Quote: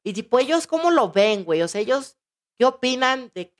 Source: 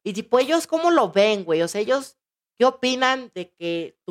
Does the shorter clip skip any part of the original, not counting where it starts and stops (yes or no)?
no